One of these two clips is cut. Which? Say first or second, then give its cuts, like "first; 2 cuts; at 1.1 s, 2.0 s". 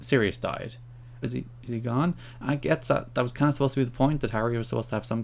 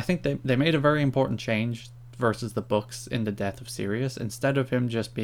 first; 1 cut; at 1.2 s